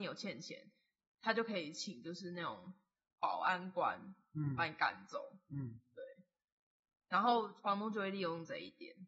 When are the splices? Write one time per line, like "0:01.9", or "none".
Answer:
none